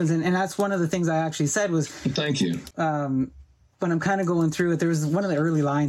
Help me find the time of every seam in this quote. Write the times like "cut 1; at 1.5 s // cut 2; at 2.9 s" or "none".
cut 1; at 2.7 s